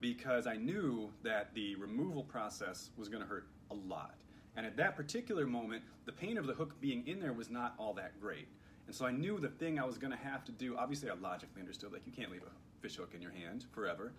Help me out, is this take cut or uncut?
uncut